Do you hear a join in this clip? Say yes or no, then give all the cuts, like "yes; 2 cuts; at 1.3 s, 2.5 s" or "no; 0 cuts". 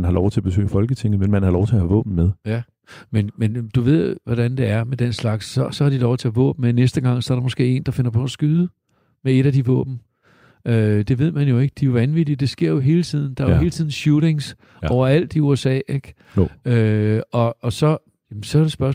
no; 0 cuts